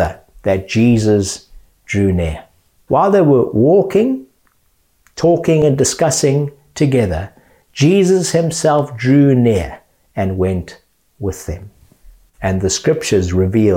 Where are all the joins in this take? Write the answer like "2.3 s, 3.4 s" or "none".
2.9 s, 12.3 s